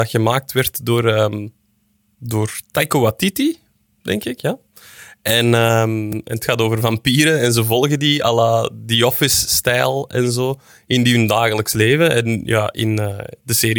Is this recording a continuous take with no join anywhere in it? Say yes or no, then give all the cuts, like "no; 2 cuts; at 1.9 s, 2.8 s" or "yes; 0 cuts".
yes; 0 cuts